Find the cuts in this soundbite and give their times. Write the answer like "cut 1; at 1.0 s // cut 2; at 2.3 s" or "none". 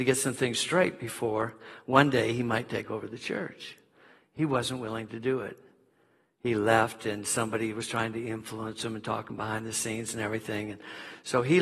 none